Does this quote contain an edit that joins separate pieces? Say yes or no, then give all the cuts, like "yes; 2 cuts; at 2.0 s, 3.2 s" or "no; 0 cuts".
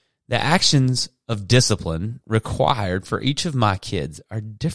no; 0 cuts